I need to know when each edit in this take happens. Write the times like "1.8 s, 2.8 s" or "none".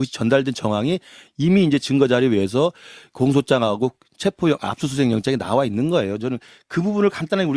none